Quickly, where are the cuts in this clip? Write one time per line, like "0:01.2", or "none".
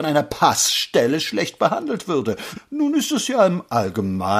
0:02.5